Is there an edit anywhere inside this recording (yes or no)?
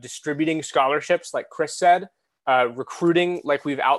no